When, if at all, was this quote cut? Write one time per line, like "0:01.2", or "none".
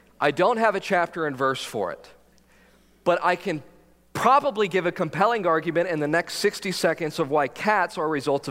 none